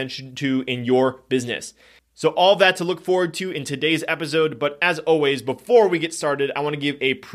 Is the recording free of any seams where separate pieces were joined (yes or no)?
yes